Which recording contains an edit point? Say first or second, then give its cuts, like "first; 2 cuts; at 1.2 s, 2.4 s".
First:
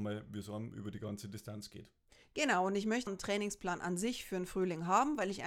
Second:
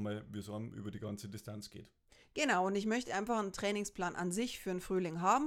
first; 1 cut; at 3.1 s